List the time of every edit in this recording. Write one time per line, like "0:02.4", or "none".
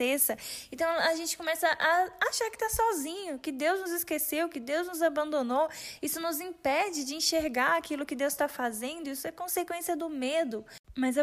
none